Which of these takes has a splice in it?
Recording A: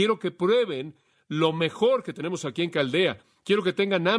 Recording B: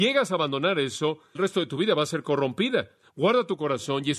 B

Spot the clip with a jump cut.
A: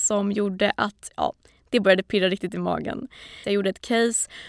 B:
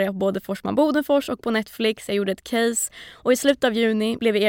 A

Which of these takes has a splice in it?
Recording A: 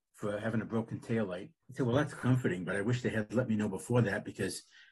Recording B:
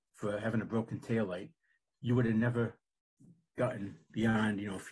A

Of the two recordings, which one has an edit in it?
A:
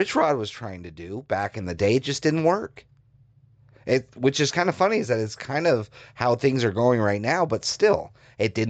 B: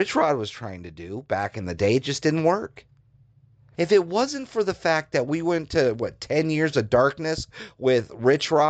B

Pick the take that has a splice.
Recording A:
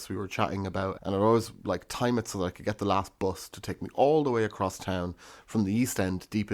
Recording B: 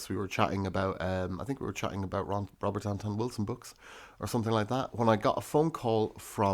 A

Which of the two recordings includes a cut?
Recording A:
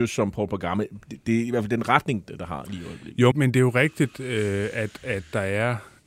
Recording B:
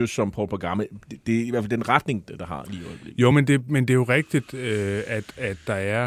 A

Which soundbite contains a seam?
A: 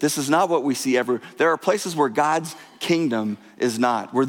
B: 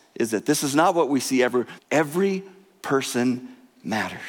B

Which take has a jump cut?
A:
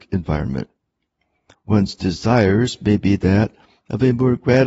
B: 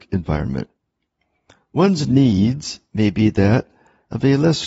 A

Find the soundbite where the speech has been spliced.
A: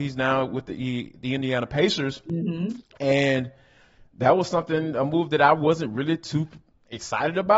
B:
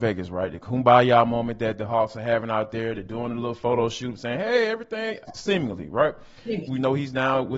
B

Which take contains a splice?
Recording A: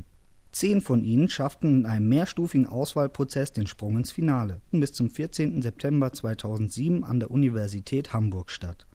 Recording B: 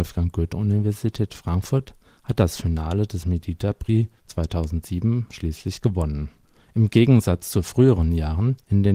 A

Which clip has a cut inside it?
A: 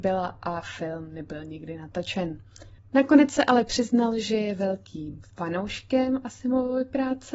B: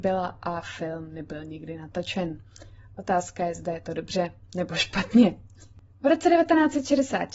A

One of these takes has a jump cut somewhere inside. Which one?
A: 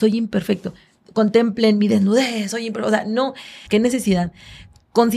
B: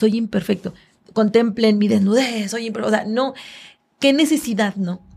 A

